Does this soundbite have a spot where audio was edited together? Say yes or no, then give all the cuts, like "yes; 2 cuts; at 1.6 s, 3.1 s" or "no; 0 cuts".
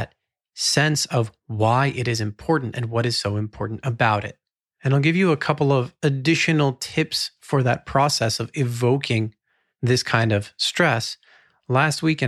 no; 0 cuts